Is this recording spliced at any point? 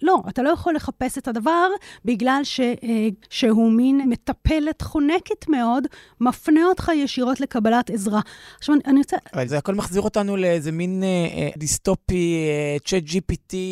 yes; 2 cuts; at 3.2 s, 11.6 s

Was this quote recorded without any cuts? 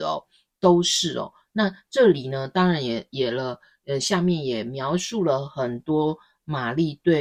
yes; 0 cuts

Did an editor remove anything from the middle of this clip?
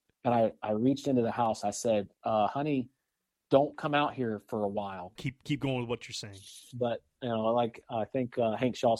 yes; 2 cuts; at 5.2 s, 6.7 s

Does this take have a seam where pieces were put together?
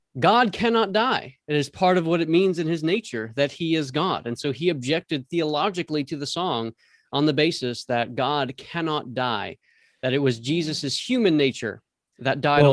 no; 0 cuts

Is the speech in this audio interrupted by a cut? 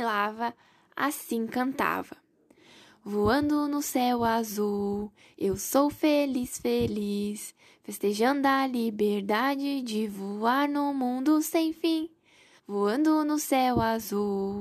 yes; 1 cut; at 12.6 s

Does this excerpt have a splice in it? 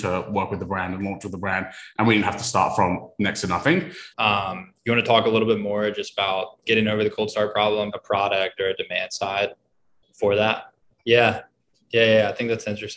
yes; 3 cuts; at 4.1 s, 7.9 s, 11.0 s

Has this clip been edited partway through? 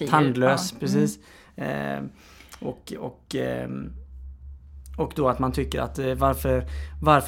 no; 0 cuts

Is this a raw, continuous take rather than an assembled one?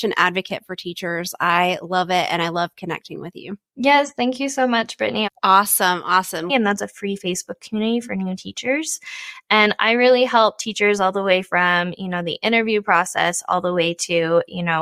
no; 2 cuts; at 5.3 s, 6.5 s

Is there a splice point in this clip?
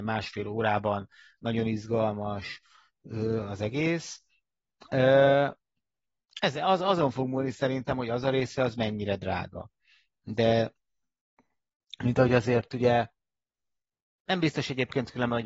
no; 0 cuts

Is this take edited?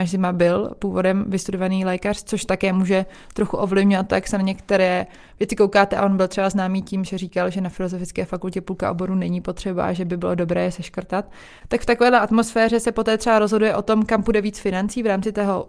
no; 0 cuts

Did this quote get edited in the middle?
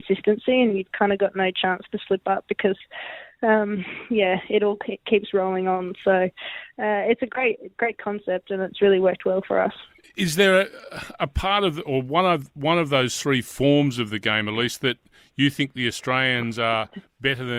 no; 0 cuts

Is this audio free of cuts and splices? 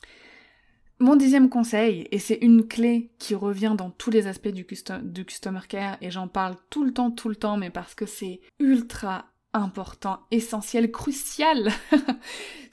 no; 1 cut; at 8.5 s

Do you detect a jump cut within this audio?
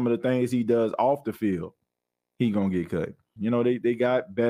yes; 1 cut; at 3.4 s

